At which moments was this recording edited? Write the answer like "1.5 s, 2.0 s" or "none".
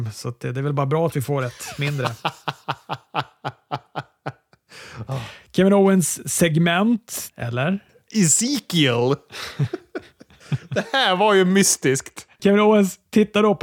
7.3 s, 12.4 s